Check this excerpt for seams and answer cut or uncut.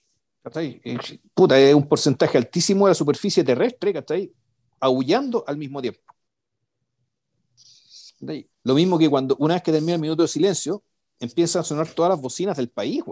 cut